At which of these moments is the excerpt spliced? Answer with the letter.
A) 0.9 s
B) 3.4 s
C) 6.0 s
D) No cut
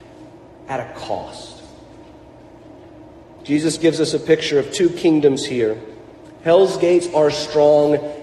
B